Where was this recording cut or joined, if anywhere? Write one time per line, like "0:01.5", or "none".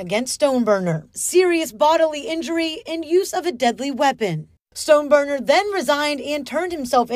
0:01.1